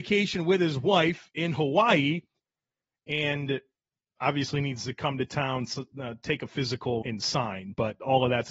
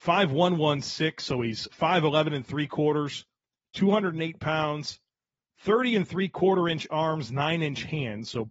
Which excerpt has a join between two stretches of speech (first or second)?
first